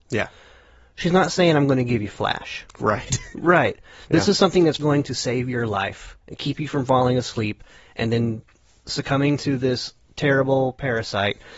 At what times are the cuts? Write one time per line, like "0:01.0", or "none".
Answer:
0:03.3
0:04.8
0:06.2